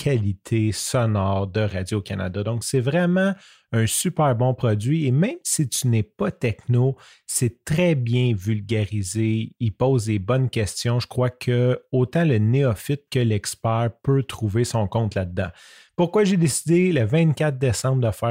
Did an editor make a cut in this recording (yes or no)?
no